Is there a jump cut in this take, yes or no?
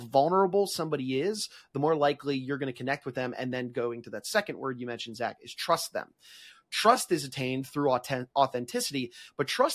no